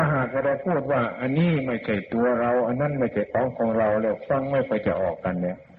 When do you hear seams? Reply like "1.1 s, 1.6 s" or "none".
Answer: none